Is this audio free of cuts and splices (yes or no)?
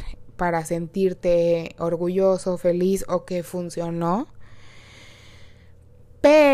no